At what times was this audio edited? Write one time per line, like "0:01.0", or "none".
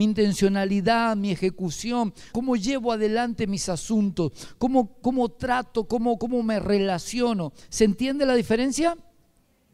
0:02.3